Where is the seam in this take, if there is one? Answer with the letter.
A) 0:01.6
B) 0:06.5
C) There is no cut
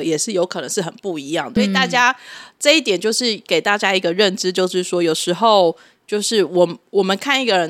A